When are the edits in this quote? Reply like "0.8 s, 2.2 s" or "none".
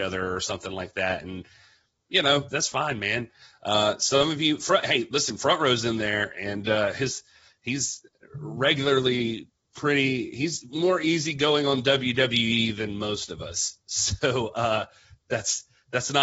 none

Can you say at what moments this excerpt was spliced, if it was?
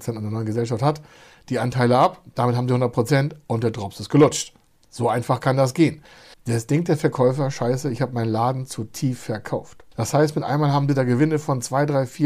6.3 s, 9.9 s

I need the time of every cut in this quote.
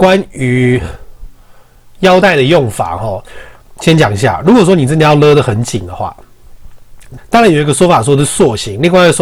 7.2 s

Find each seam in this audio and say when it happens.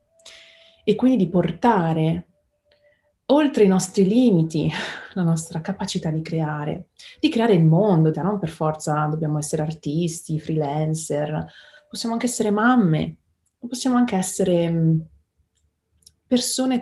8.1 s

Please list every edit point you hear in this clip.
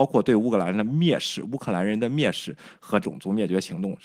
3.0 s

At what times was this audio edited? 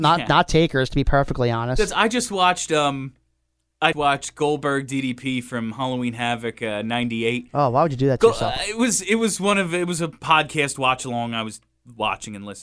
3.9 s

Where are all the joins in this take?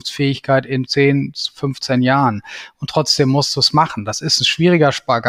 none

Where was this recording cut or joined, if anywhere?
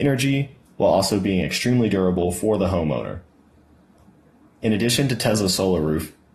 none

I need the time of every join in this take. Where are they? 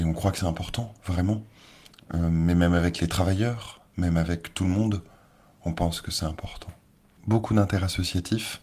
none

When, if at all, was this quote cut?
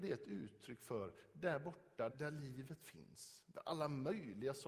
2.1 s

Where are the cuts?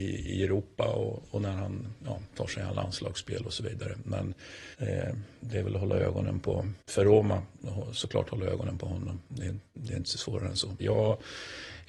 4.7 s, 6.8 s, 10.8 s

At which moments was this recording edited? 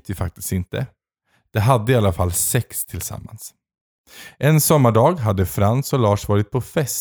none

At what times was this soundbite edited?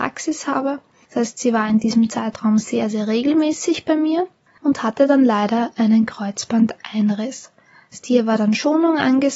none

